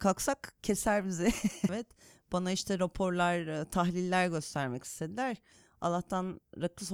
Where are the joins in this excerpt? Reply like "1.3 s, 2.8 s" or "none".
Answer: 1.7 s